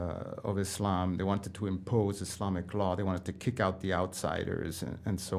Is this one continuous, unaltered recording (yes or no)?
yes